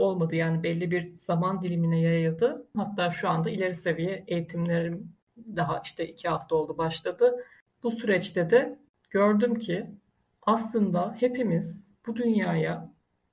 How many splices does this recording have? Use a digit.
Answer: 1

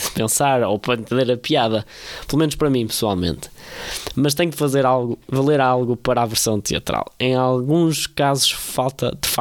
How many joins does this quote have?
0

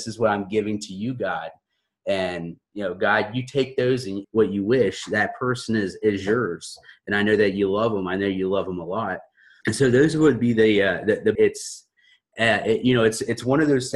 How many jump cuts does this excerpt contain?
3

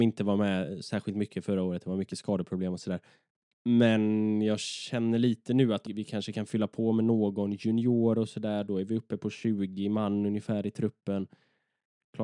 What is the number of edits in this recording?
2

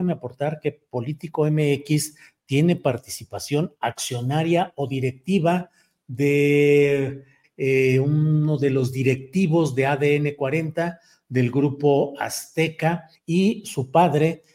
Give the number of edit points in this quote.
2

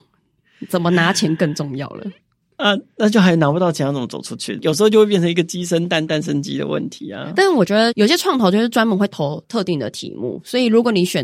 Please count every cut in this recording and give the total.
0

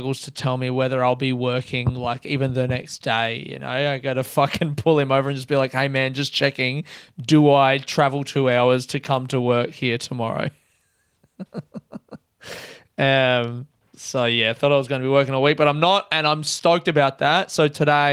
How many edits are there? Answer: 0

